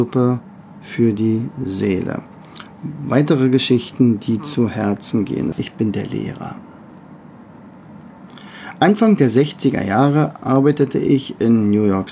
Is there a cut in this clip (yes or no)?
yes